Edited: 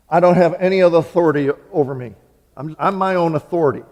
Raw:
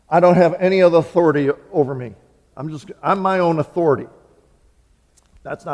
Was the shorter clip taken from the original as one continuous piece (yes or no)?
no